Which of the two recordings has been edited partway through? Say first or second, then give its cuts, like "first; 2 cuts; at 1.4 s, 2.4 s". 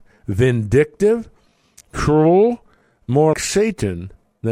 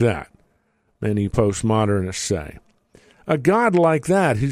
first; 1 cut; at 3.3 s